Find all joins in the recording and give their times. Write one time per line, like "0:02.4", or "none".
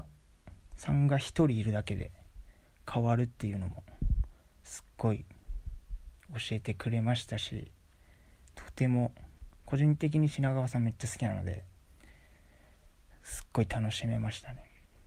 none